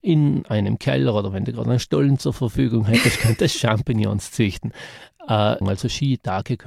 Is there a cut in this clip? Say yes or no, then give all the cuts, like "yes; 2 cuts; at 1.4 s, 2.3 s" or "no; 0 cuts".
yes; 1 cut; at 5.6 s